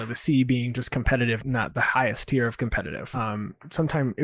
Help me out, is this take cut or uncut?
cut